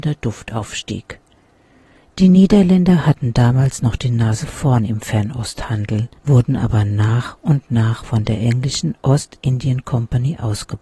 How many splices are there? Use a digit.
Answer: 2